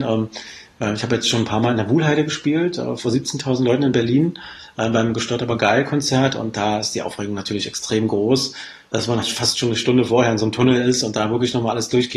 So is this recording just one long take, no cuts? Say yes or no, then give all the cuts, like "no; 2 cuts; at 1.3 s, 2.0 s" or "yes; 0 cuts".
no; 1 cut; at 9.2 s